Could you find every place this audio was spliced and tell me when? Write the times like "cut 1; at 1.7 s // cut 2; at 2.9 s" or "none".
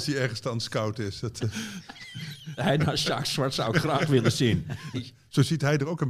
cut 1; at 2.6 s // cut 2; at 4.9 s